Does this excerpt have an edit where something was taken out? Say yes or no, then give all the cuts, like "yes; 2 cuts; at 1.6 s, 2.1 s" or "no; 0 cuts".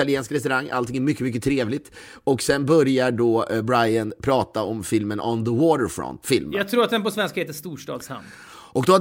yes; 1 cut; at 6.2 s